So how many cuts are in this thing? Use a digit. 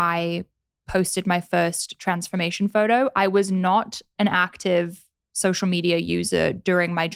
0